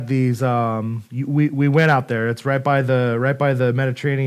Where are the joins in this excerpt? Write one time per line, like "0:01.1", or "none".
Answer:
0:01.1